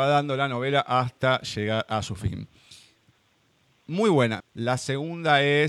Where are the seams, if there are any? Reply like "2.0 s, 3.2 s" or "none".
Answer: 4.4 s